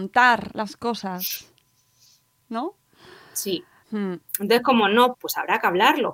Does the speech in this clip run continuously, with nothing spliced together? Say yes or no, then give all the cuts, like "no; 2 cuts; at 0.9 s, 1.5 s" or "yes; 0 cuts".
no; 2 cuts; at 3.8 s, 5.1 s